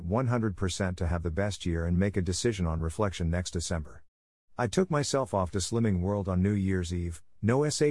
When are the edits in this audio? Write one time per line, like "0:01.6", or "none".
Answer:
none